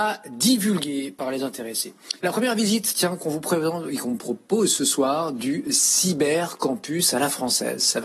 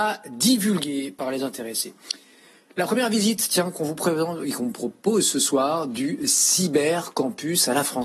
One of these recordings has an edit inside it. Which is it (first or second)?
first